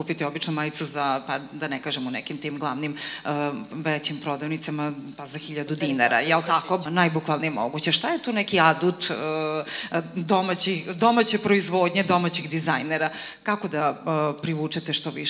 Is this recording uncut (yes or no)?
no